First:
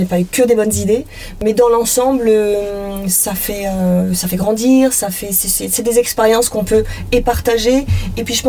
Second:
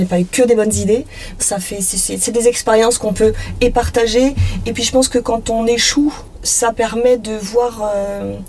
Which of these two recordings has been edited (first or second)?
second